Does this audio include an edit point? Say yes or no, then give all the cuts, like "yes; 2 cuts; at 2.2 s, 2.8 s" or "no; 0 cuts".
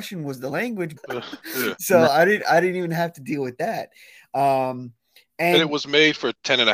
yes; 1 cut; at 1.0 s